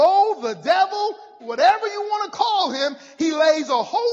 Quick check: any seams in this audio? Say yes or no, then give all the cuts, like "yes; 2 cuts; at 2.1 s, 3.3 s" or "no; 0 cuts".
yes; 1 cut; at 1.4 s